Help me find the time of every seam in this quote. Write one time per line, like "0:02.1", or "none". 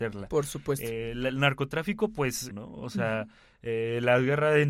0:02.5